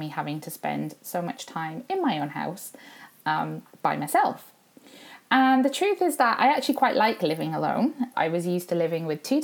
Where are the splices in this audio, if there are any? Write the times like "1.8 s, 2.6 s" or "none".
8.1 s